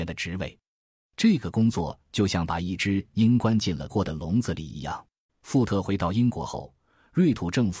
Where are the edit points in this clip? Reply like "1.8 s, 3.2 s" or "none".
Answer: 3.9 s, 5.3 s